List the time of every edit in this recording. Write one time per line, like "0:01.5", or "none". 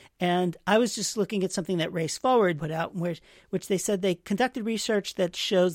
0:02.6